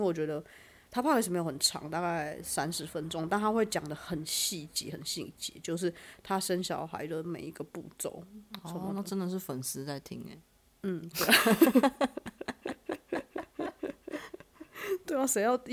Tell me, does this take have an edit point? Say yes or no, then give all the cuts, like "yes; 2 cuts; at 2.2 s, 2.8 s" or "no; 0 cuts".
no; 0 cuts